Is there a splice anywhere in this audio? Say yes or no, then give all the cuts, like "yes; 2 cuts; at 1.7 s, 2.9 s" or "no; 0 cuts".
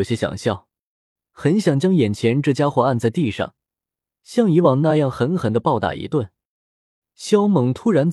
yes; 2 cuts; at 1.2 s, 7.0 s